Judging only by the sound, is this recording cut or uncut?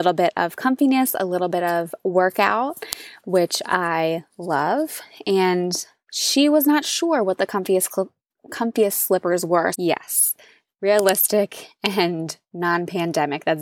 cut